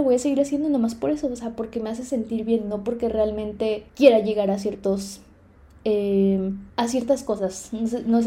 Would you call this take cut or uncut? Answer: cut